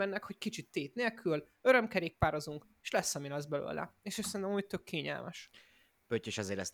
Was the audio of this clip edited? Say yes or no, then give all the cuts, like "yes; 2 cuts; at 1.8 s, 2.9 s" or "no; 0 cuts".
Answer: no; 0 cuts